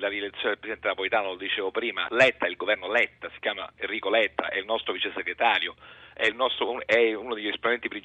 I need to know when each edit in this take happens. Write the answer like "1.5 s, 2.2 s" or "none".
2.1 s